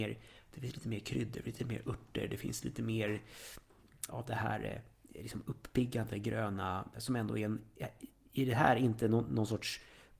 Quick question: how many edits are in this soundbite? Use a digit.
2